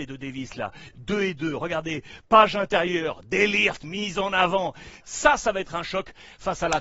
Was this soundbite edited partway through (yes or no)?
yes